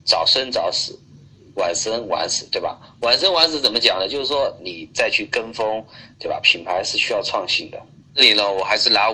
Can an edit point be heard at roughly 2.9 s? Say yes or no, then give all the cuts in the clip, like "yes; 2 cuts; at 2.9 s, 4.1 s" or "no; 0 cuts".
no; 3 cuts; at 4.6 s, 6.1 s, 8.0 s